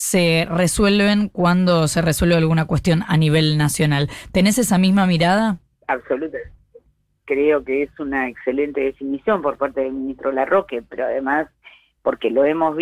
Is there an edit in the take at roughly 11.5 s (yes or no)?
no